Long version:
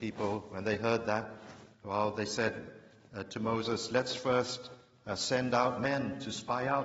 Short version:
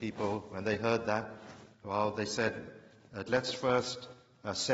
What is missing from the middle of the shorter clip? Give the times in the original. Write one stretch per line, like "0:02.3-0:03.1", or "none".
0:03.3-0:03.9